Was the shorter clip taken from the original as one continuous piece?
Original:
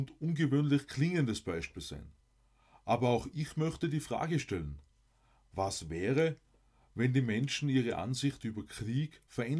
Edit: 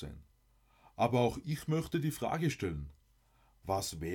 yes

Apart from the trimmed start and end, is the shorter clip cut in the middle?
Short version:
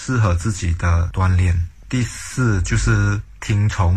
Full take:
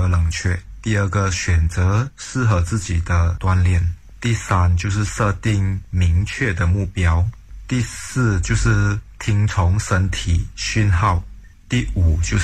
yes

